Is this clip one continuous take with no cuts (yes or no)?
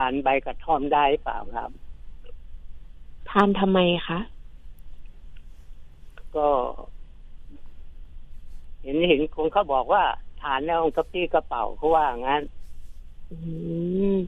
no